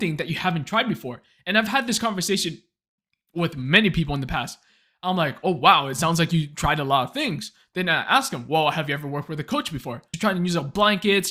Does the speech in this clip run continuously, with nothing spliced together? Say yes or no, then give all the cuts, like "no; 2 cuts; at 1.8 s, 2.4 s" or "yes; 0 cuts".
no; 1 cut; at 10.1 s